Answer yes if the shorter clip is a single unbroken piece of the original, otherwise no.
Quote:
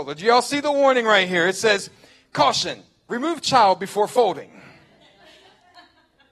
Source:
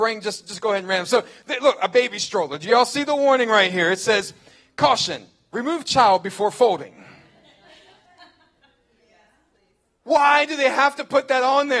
yes